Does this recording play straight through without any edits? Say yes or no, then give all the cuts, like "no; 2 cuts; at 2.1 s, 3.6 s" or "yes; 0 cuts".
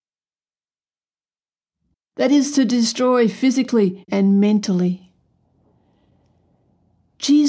no; 2 cuts; at 1.9 s, 4.1 s